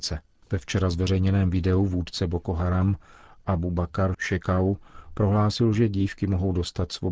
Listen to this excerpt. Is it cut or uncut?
uncut